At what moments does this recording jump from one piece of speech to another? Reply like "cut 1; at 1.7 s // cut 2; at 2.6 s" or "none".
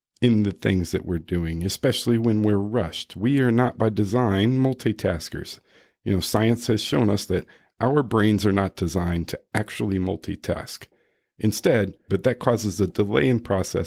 cut 1; at 12.1 s